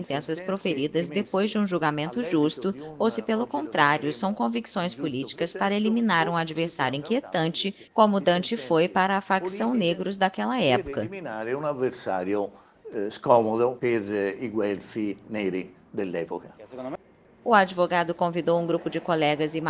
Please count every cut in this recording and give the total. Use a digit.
1